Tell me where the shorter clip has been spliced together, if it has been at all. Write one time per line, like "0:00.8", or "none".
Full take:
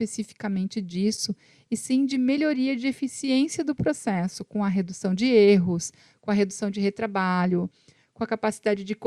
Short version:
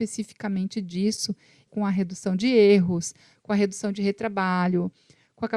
0:01.7